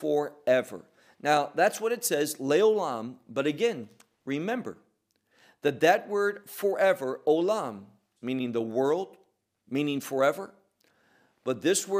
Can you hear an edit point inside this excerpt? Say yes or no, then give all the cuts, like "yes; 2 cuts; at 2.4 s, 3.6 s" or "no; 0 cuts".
yes; 2 cuts; at 8.2 s, 9.6 s